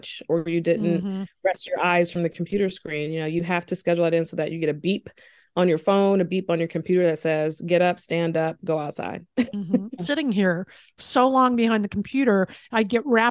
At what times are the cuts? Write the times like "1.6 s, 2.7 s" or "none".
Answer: 10.0 s